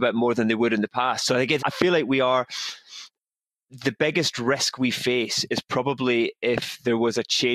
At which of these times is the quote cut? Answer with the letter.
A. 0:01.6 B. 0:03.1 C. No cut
A